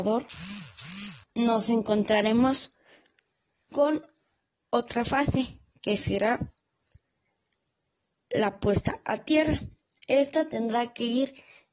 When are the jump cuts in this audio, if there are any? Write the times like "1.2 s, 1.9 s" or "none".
1.2 s